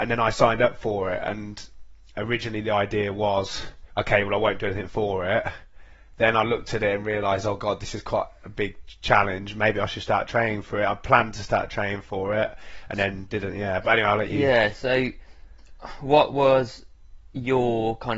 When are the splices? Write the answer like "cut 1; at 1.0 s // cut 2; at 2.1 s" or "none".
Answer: cut 1; at 3.9 s